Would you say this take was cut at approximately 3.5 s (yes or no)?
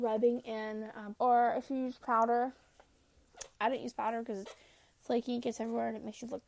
no